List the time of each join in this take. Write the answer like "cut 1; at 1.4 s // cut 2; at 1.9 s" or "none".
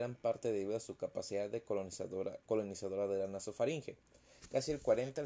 none